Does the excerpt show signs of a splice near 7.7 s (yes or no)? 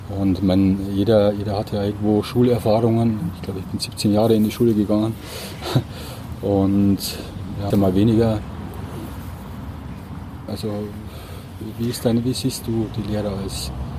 yes